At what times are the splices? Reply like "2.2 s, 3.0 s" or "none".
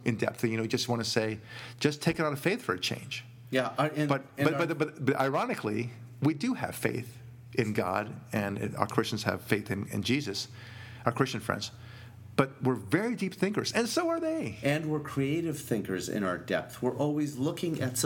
none